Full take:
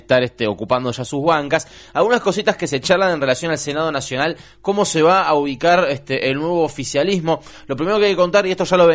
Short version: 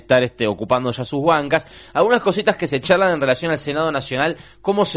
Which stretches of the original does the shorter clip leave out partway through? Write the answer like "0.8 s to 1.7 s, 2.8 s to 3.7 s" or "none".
none